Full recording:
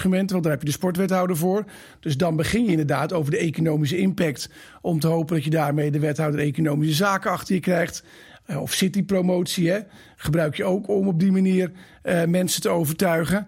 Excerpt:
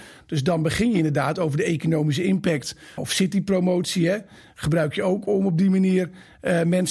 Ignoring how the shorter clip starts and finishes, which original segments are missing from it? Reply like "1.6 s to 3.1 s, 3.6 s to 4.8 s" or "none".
4.7 s to 8.6 s